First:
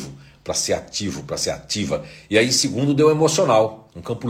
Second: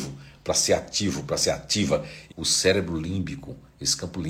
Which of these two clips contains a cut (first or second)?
second